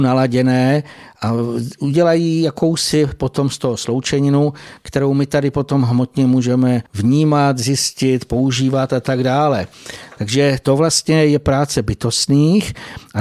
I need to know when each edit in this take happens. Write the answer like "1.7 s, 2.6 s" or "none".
6.9 s